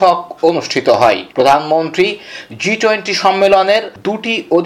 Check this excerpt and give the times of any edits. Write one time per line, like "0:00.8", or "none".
0:01.3